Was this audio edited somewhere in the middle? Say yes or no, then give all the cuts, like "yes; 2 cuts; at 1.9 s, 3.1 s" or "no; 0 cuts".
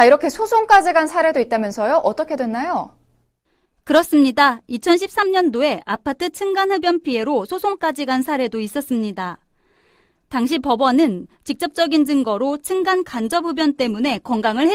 no; 0 cuts